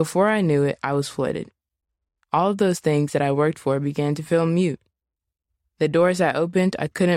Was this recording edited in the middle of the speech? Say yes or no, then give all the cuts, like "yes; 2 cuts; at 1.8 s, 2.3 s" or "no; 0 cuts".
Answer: no; 0 cuts